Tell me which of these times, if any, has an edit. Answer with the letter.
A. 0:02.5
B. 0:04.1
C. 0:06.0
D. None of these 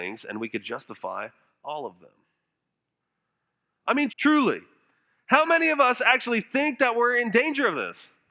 B